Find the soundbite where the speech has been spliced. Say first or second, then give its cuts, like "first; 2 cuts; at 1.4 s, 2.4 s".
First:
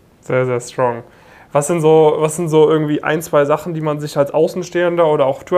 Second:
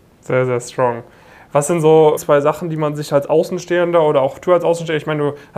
second; 1 cut; at 2.2 s